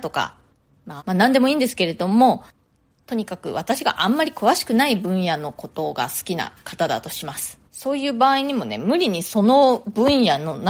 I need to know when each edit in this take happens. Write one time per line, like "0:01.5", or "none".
0:01.0
0:07.7